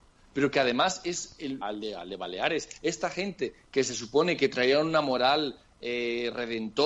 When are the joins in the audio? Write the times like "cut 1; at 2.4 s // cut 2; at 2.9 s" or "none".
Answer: cut 1; at 1.6 s